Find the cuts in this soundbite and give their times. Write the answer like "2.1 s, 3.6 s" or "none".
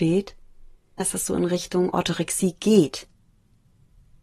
1.0 s